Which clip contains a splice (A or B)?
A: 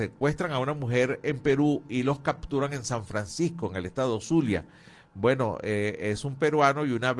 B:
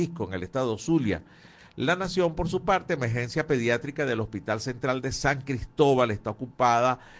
B